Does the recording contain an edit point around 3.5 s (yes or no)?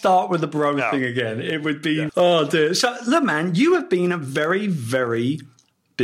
no